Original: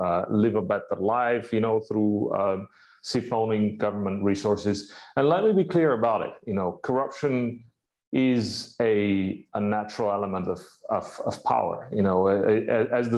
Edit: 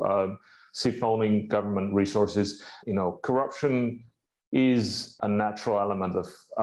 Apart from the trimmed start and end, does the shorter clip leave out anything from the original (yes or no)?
yes